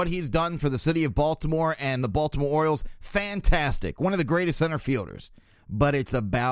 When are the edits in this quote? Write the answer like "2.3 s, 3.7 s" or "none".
none